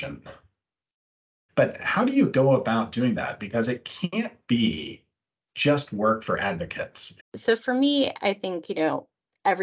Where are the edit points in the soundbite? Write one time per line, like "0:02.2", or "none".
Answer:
0:01.5
0:07.2
0:08.2